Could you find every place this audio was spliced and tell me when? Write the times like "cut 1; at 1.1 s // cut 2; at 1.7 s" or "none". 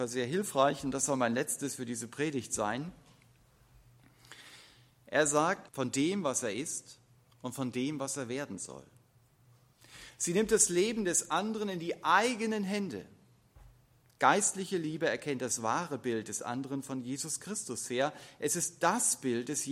cut 1; at 5.7 s